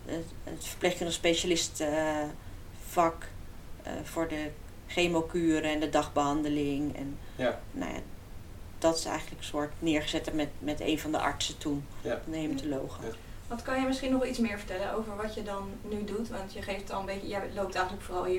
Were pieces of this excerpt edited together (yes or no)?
no